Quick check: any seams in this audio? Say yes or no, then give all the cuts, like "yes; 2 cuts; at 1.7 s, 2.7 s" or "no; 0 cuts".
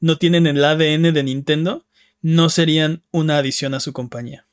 no; 0 cuts